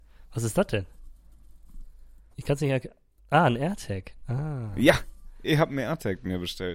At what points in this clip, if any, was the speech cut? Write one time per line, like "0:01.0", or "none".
0:02.3